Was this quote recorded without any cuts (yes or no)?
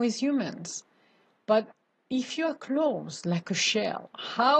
yes